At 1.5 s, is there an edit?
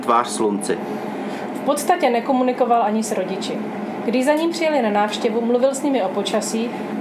yes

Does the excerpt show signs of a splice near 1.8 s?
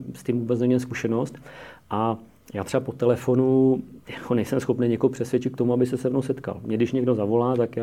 no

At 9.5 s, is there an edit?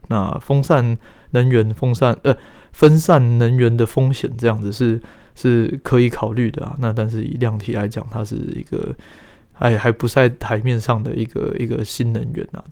no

